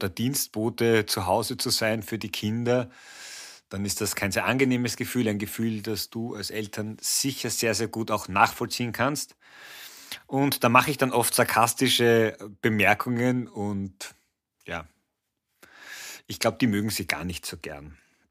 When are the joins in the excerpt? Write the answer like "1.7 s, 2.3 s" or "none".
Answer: none